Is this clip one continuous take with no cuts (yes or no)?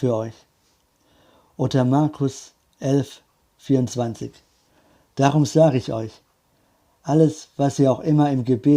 yes